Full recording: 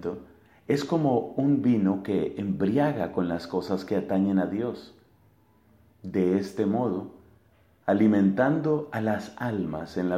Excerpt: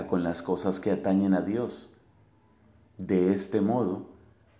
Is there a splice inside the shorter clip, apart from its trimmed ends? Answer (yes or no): no